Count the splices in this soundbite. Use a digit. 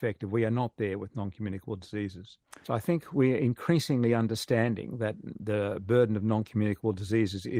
1